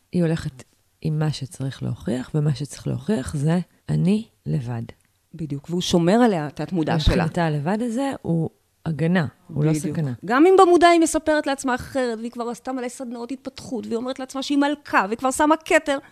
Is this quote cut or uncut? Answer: uncut